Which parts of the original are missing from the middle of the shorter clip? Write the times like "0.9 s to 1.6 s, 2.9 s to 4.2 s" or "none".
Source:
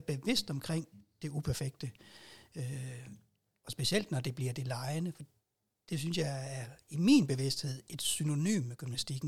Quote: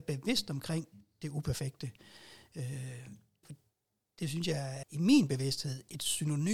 3.4 s to 5.1 s, 6.5 s to 6.8 s